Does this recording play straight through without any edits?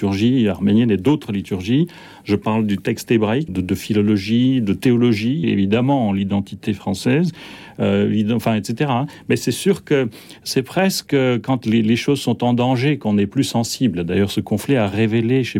no; 2 cuts; at 3.5 s, 5.4 s

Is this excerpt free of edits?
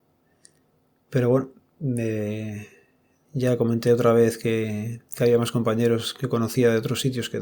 no; 1 cut; at 3.2 s

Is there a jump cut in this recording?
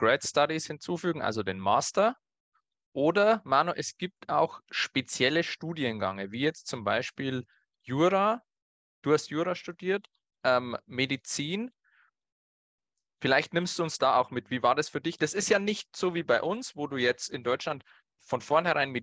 no; 0 cuts

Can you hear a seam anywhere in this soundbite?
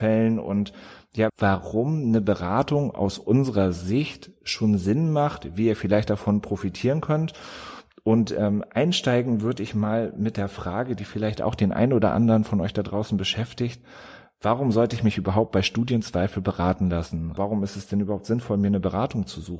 yes; 2 cuts; at 1.3 s, 17.4 s

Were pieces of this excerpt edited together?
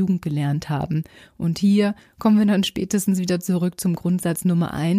no; 0 cuts

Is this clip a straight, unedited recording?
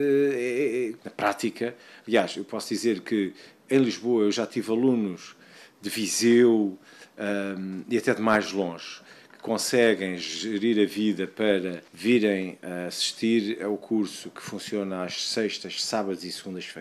no; 2 cuts; at 1.0 s, 11.9 s

